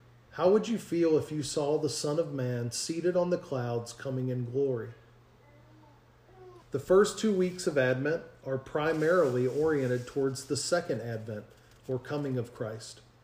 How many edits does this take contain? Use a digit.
1